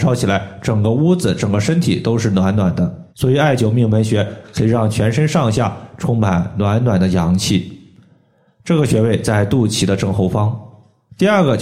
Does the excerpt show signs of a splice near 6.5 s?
no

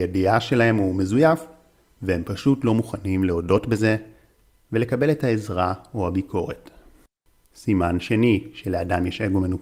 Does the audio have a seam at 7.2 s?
no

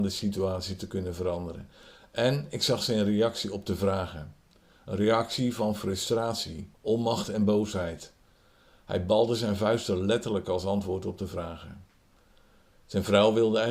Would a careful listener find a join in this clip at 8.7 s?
no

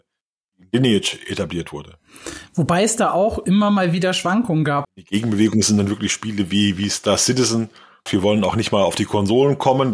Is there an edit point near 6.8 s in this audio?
no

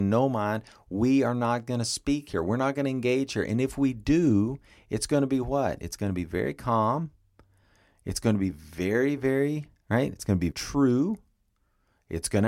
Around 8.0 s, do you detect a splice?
no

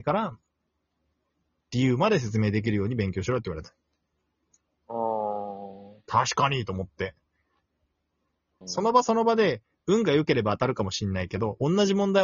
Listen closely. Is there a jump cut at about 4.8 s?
no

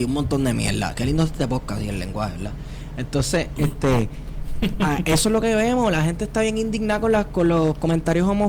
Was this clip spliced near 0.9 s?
no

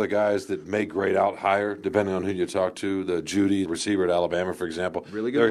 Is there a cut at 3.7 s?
yes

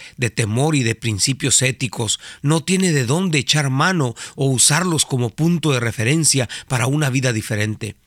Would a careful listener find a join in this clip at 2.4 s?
yes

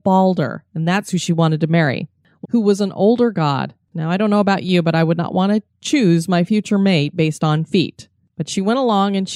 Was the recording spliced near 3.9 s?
yes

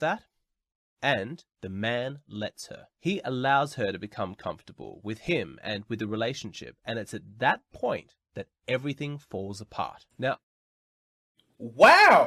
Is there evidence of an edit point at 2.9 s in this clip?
no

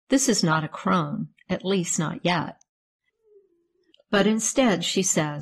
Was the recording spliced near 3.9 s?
yes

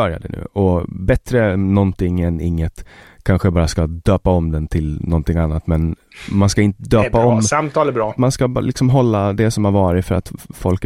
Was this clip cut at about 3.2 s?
no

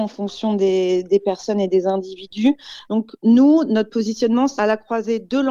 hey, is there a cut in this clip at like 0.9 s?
no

